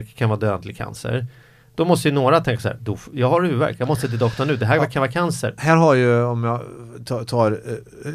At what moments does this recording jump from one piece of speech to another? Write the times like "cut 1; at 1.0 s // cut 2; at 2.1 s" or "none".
cut 1; at 5.6 s